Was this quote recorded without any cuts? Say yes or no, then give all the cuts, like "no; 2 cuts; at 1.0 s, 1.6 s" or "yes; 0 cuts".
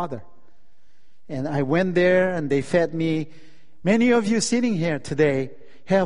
no; 1 cut; at 3.8 s